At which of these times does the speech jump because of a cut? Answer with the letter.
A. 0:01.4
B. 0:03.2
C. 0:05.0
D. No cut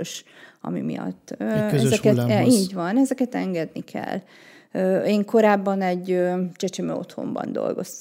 D